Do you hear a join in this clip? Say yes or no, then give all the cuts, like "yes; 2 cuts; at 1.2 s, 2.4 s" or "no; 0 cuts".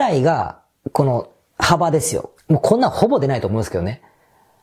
yes; 1 cut; at 2.4 s